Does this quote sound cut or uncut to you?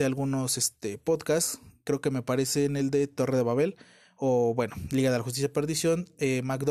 uncut